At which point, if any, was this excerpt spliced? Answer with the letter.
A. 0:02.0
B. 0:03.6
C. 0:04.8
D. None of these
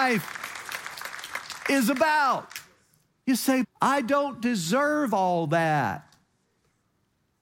B